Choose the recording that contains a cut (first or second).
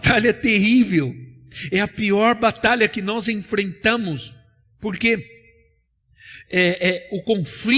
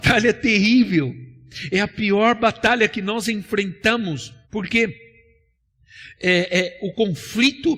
second